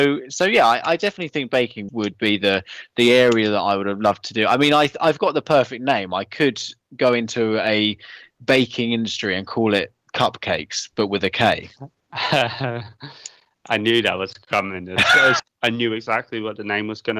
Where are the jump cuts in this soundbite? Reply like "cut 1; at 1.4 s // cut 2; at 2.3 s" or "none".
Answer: cut 1; at 1.9 s // cut 2; at 15.4 s